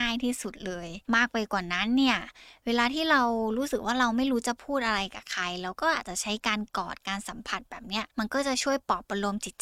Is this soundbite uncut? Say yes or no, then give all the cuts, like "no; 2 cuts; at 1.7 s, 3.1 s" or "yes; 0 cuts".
no; 2 cuts; at 1.1 s, 8.1 s